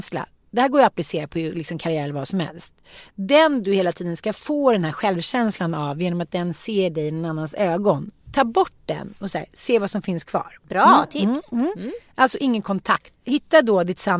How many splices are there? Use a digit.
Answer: 1